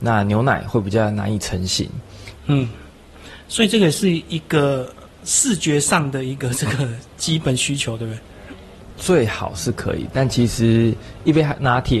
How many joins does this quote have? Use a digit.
1